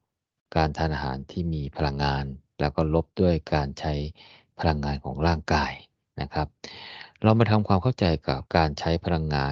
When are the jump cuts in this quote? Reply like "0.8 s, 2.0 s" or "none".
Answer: 8.5 s